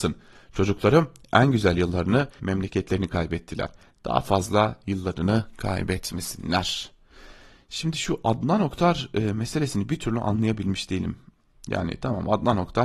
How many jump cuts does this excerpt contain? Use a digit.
1